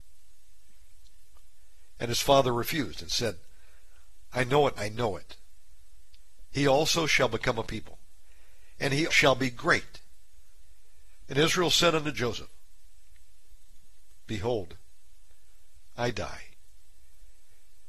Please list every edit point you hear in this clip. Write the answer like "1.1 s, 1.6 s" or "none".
4.8 s, 9.1 s, 11.2 s